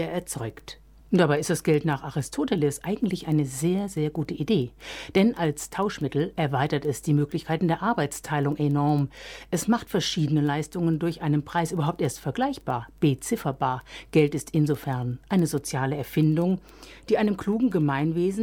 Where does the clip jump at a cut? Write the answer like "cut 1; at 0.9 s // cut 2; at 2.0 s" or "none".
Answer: cut 1; at 1.0 s